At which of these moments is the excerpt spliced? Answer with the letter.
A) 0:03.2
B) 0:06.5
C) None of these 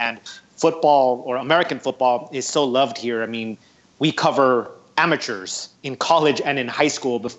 C